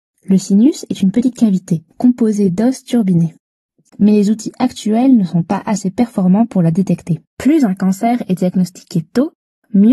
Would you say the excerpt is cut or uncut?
cut